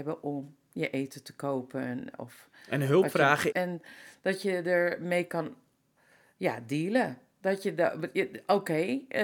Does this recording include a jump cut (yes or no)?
yes